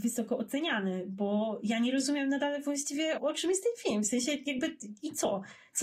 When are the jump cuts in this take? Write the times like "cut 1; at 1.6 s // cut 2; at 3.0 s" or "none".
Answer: cut 1; at 3.2 s